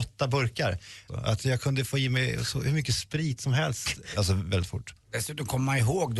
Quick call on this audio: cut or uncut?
cut